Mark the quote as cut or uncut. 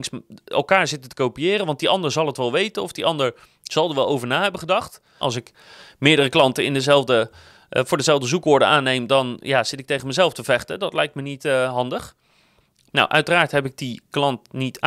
cut